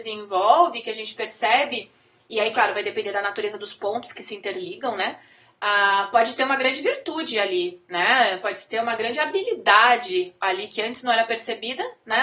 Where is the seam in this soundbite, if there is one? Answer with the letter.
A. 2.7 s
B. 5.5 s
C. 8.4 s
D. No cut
D